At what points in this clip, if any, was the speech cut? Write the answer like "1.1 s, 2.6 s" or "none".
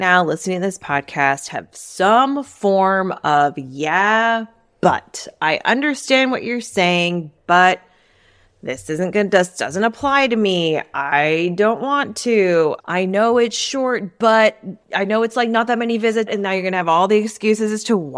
12.8 s, 14.8 s, 16.3 s